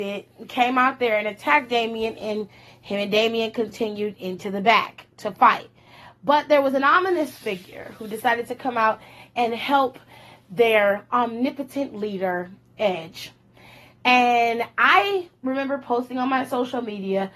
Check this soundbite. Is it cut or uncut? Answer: uncut